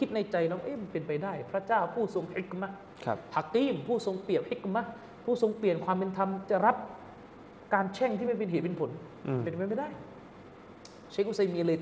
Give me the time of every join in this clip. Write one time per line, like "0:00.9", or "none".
none

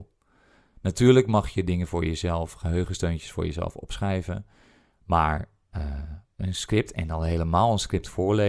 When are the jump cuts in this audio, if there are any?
none

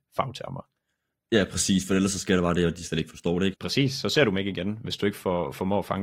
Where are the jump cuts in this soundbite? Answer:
0:03.5

